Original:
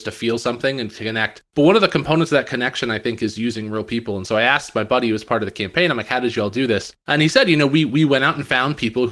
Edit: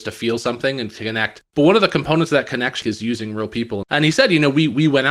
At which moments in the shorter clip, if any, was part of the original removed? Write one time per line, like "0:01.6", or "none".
0:02.8
0:03.8